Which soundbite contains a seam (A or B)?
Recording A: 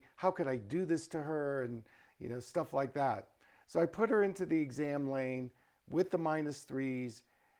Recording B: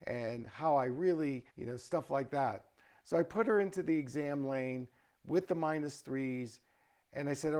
B